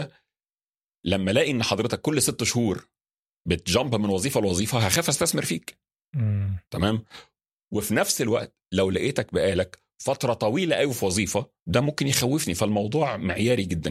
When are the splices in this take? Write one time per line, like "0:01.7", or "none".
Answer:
0:06.7
0:11.6